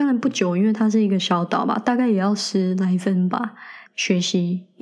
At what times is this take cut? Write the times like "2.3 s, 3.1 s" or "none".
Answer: 3.8 s